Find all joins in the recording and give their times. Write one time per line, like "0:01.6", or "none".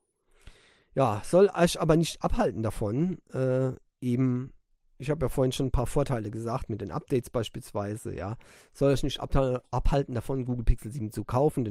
none